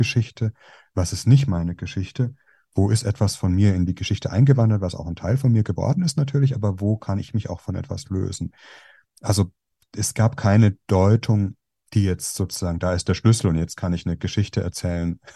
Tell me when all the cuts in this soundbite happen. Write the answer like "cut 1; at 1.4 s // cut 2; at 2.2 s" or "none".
none